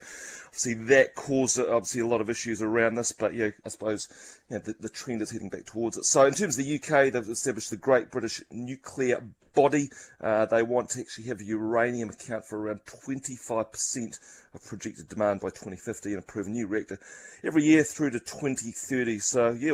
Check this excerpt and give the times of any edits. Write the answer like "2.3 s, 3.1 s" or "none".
3.6 s

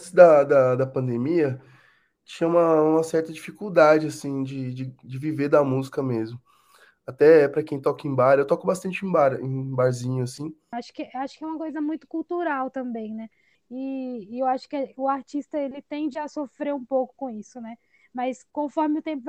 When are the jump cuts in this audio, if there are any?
10.7 s, 13.5 s

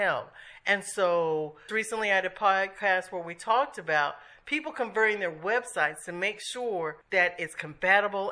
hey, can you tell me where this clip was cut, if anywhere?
1.7 s, 7.0 s

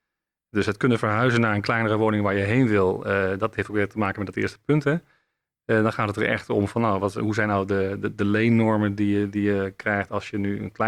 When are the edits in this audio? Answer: none

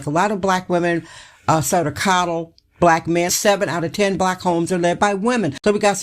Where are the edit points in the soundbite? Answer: 3.3 s

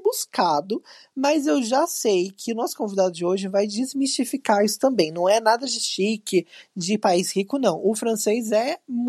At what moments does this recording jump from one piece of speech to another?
none

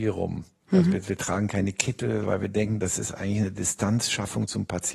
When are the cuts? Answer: none

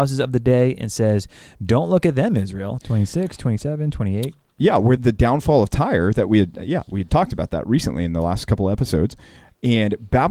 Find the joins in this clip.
2.8 s, 5.0 s, 7.1 s

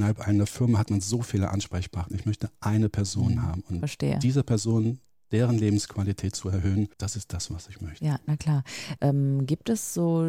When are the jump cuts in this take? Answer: 6.9 s, 9.0 s

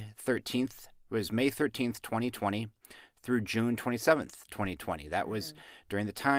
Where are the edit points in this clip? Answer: none

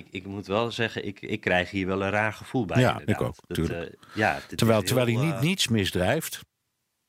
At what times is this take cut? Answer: none

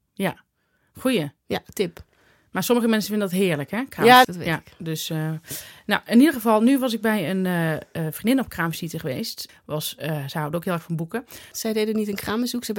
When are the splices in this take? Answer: 4.2 s, 9.5 s, 11.5 s

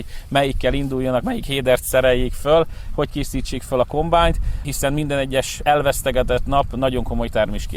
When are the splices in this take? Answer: none

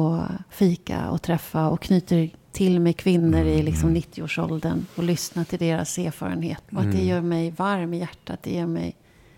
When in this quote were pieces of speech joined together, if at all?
6.7 s

